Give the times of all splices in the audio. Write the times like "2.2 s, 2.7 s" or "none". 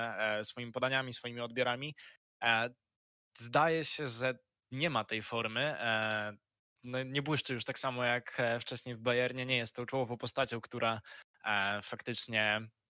6.8 s

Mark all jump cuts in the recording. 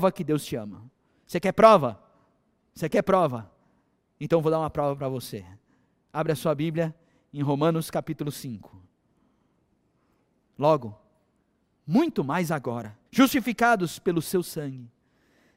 10.4 s, 13.1 s

